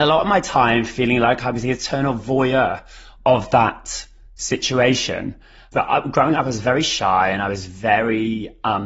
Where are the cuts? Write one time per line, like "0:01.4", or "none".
0:05.7